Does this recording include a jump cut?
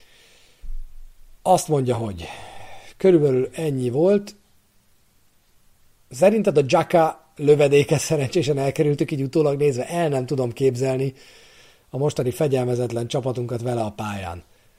no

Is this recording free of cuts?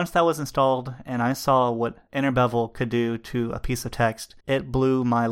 no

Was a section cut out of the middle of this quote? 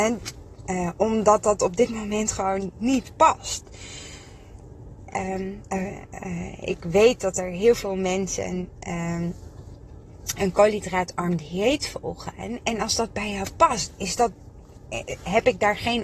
yes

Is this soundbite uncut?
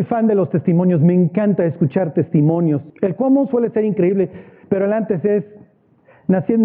no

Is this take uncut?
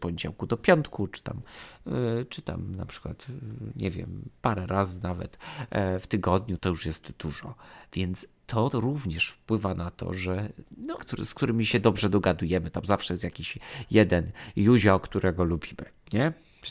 no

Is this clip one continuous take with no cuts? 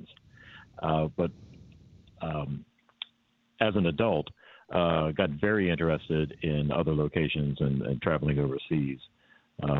yes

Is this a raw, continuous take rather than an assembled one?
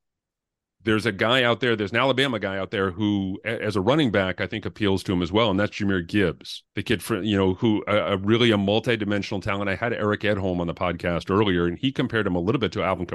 no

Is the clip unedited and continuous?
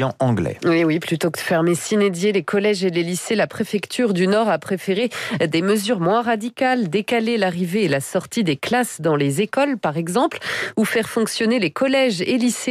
yes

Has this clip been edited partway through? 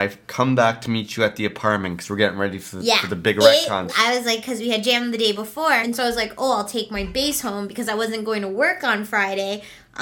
yes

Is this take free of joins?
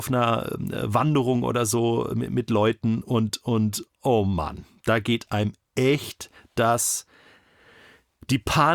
yes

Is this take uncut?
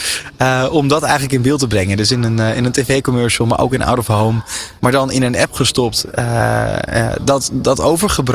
no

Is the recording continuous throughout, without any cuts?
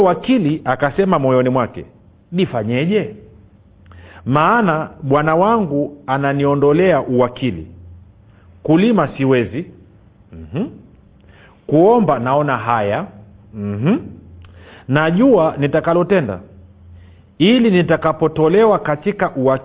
yes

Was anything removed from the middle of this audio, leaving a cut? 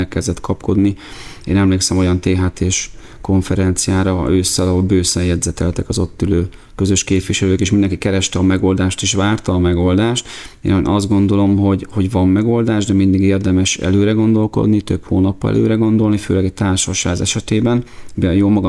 no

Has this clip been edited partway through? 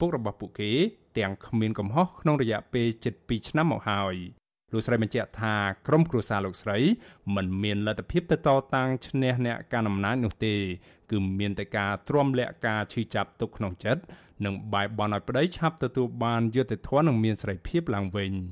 no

